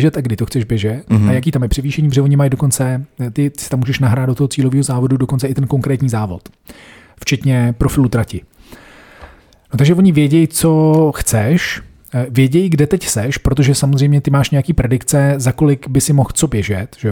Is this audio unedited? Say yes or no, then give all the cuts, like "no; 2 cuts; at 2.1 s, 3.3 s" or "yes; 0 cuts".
yes; 0 cuts